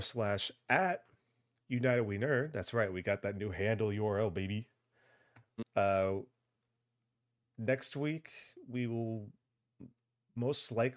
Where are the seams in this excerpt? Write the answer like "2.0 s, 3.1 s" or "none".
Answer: 5.6 s